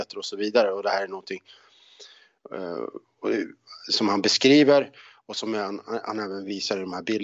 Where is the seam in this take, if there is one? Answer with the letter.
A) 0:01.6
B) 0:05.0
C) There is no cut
C